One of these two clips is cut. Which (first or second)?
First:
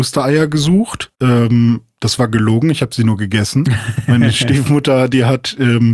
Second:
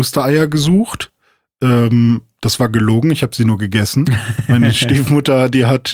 first